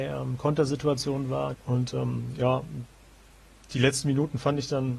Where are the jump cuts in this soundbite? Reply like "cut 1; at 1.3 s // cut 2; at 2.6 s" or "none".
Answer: cut 1; at 1.5 s